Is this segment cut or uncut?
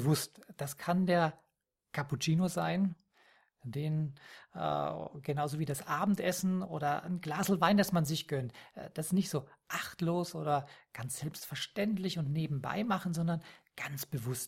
uncut